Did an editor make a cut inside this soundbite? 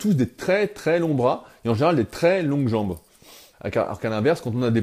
yes; 1 cut; at 3.5 s

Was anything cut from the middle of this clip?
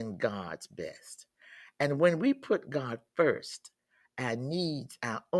no; 0 cuts

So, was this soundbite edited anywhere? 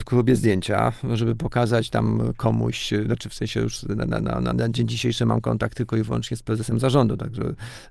yes; 1 cut; at 4.5 s

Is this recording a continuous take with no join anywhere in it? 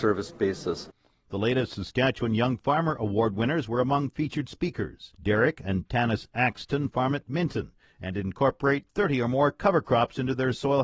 no; 2 cuts; at 1.3 s, 5.1 s

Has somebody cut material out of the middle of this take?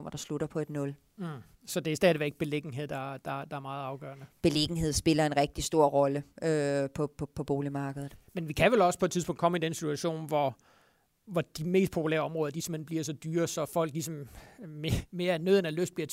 no; 0 cuts

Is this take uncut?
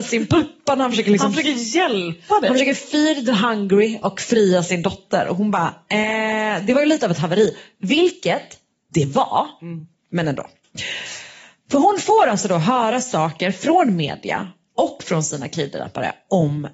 yes; 0 cuts

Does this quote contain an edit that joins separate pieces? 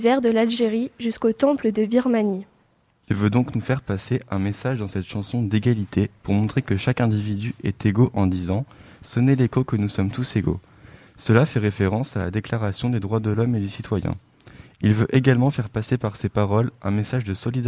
no; 0 cuts

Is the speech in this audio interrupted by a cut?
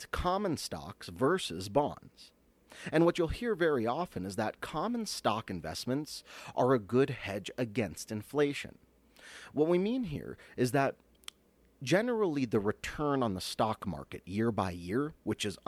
no; 0 cuts

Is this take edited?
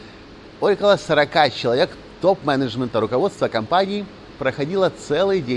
no; 0 cuts

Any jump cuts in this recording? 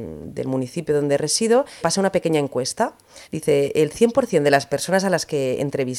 yes; 2 cuts; at 1.8 s, 3.2 s

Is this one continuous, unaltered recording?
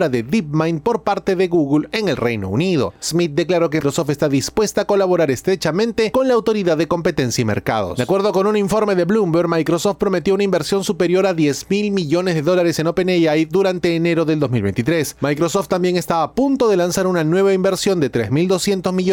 no; 1 cut; at 3.8 s

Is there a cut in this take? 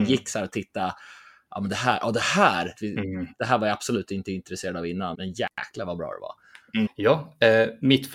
yes; 3 cuts; at 2.7 s, 5.1 s, 6.9 s

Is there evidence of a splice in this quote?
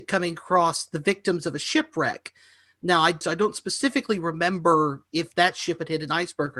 yes; 1 cut; at 3.2 s

